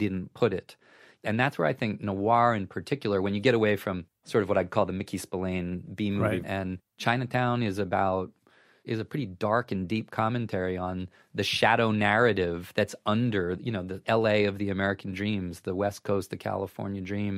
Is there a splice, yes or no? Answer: yes